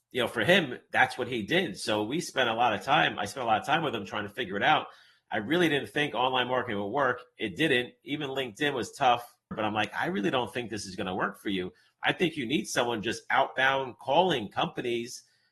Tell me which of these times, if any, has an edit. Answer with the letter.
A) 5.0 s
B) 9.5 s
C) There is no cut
B